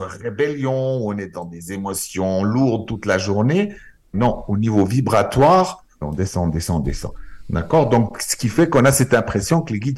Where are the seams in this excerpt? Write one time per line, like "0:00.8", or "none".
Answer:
0:04.1
0:06.0